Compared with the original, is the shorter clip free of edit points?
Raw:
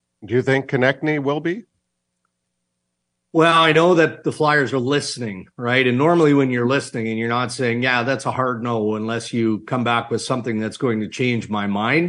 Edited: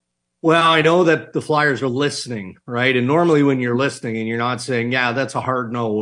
yes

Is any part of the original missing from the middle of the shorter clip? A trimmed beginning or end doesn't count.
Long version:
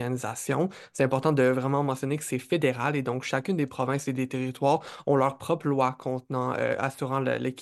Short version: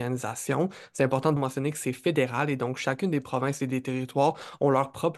yes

